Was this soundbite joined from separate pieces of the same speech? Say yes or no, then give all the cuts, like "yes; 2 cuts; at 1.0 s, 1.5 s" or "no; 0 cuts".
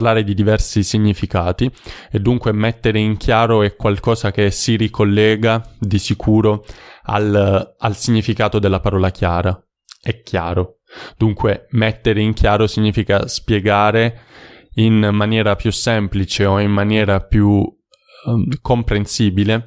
no; 0 cuts